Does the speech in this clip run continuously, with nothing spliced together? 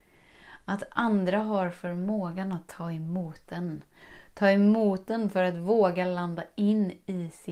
yes; 0 cuts

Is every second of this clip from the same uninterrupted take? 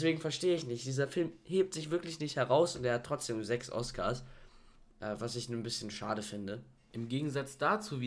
yes; 0 cuts

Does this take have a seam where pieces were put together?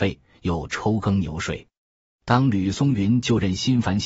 no; 0 cuts

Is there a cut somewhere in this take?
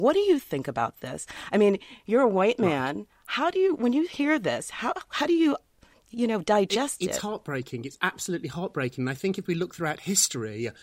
no; 0 cuts

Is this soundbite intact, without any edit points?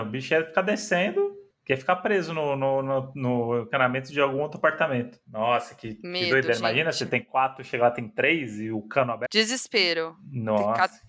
no; 1 cut; at 9.3 s

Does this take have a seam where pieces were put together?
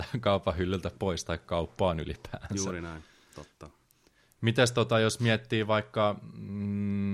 no; 0 cuts

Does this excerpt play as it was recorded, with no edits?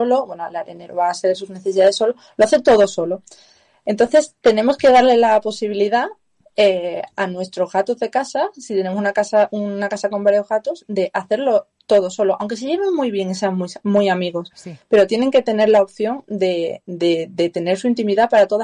yes; 0 cuts

